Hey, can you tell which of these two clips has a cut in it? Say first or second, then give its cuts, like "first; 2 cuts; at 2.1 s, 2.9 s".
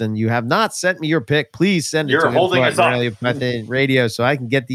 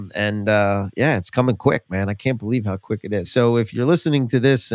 second; 1 cut; at 3.2 s